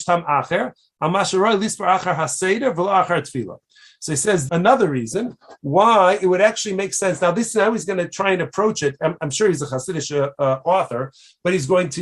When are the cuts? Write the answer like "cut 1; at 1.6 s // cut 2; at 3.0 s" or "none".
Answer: cut 1; at 4.5 s